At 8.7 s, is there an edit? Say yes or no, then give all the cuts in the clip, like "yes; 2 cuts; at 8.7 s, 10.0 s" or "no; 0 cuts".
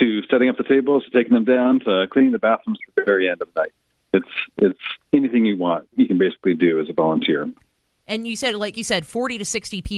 yes; 2 cuts; at 7.6 s, 8.7 s